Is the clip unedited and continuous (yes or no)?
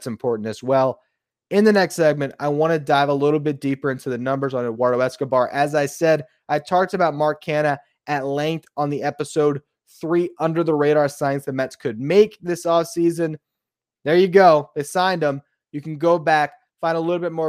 yes